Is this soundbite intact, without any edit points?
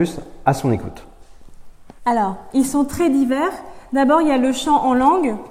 no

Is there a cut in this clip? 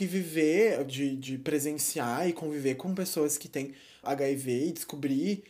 yes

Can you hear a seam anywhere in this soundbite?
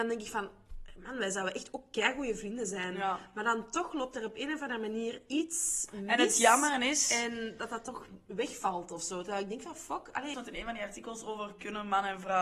yes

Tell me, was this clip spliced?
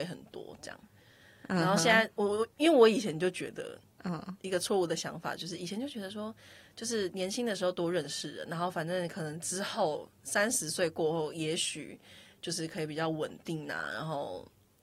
no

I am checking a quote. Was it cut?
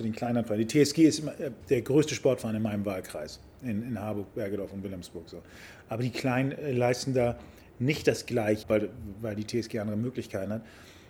yes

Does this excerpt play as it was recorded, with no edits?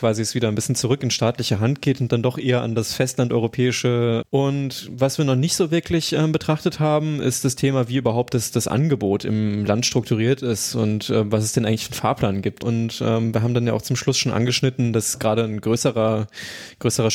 no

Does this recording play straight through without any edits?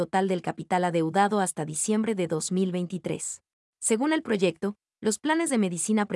no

